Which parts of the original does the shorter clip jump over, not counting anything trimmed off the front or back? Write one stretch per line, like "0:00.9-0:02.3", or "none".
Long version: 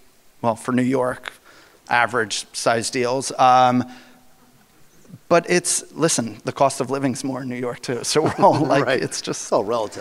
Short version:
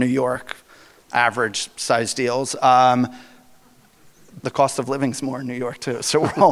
0:05.2-0:06.4